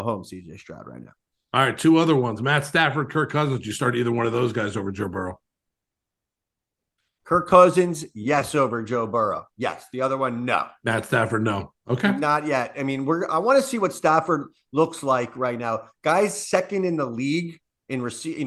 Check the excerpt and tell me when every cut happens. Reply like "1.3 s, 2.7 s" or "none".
none